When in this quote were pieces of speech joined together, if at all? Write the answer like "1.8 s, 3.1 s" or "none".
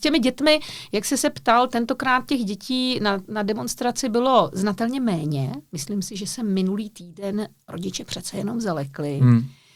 none

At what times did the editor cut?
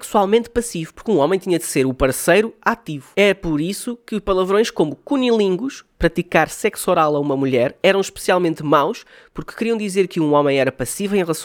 none

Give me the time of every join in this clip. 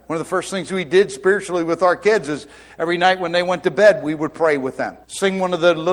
5.0 s

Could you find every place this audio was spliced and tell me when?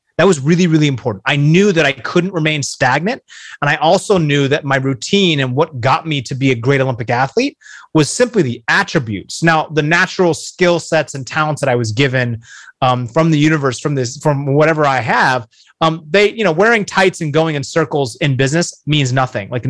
none

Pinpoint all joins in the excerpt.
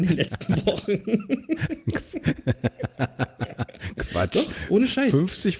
none

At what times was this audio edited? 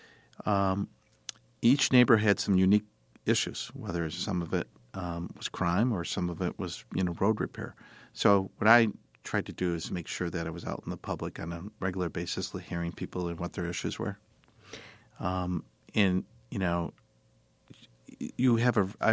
15.0 s

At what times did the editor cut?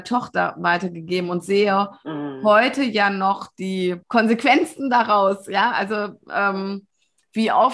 4.0 s

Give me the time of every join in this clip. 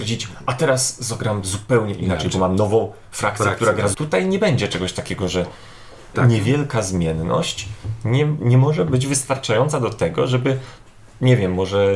3.9 s, 6.1 s

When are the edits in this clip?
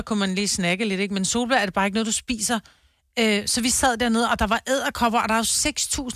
none

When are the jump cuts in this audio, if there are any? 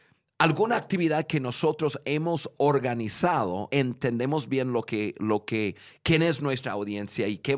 3.7 s

